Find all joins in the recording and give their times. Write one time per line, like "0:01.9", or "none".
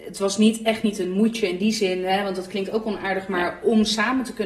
none